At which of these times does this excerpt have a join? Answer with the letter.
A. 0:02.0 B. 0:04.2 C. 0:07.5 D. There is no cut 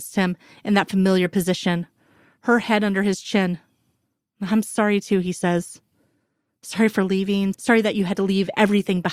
C